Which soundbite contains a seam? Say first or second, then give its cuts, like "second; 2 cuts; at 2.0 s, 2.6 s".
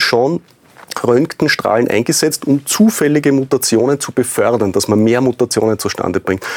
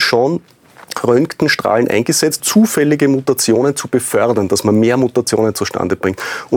second; 1 cut; at 2.4 s